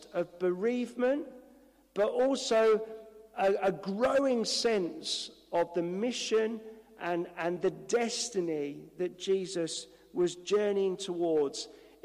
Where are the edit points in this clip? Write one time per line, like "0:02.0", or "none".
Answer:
none